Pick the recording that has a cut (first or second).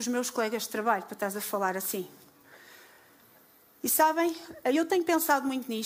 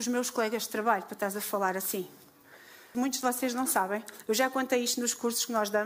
second